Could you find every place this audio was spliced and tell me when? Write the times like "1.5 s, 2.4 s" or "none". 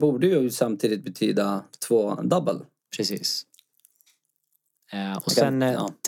2.9 s